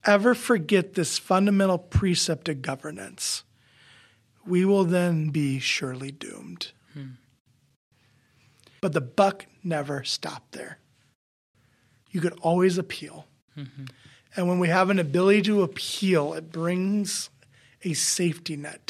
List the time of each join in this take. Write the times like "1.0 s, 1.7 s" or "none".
8.8 s